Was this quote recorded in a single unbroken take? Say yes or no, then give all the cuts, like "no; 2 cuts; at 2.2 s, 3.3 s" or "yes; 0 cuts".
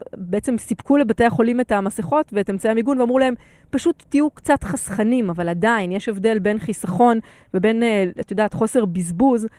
yes; 0 cuts